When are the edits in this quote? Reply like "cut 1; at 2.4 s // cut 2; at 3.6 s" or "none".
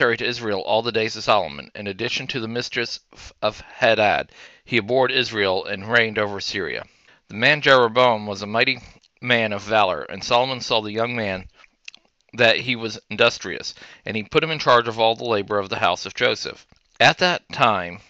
cut 1; at 7.1 s

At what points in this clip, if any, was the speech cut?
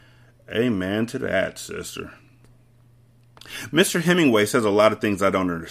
none

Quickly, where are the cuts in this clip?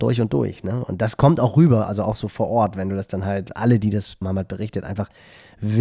cut 1; at 4.2 s

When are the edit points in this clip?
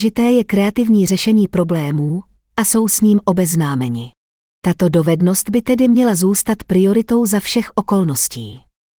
none

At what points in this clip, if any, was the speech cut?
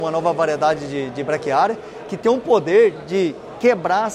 cut 1; at 2.9 s

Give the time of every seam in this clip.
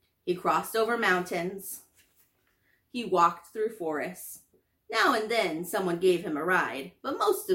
none

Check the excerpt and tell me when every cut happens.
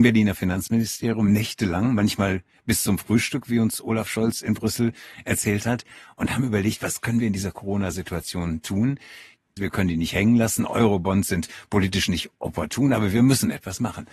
cut 1; at 9.6 s

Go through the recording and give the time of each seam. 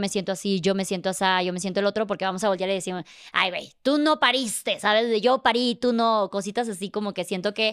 none

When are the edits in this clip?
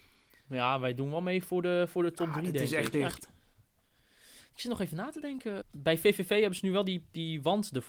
cut 1; at 2.9 s // cut 2; at 5.6 s

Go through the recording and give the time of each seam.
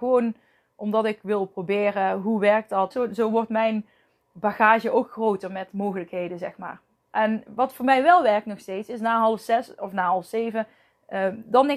cut 1; at 2.9 s // cut 2; at 7.5 s

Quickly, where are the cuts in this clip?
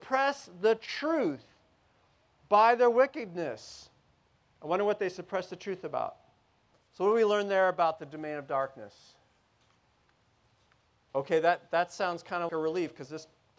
cut 1; at 6.7 s // cut 2; at 11.1 s // cut 3; at 12.5 s

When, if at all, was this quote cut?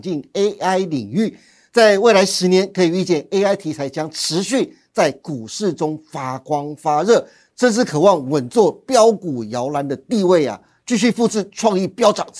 none

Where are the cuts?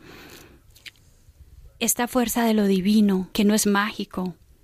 cut 1; at 3.3 s

